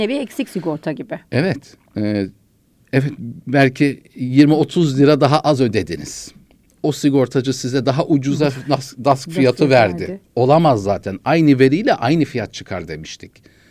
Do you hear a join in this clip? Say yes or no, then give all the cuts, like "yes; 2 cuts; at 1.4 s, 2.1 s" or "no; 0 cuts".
no; 0 cuts